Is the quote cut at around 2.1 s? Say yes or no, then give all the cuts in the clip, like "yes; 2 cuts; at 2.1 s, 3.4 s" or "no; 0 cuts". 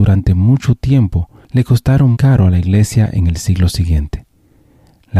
yes; 1 cut; at 2.1 s